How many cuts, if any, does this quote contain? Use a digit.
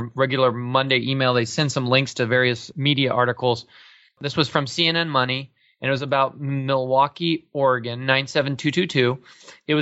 0